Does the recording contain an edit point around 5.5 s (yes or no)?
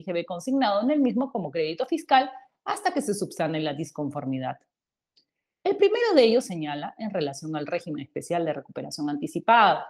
yes